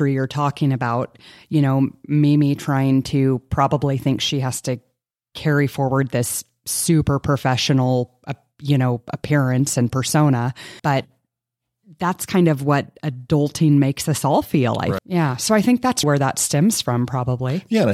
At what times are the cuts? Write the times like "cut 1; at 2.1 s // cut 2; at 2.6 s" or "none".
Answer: cut 1; at 10.8 s // cut 2; at 15.0 s // cut 3; at 16.0 s